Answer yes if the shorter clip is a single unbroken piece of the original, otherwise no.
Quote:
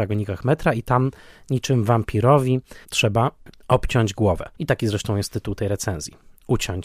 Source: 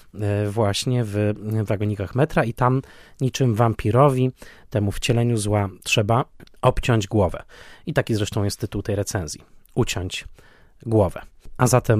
no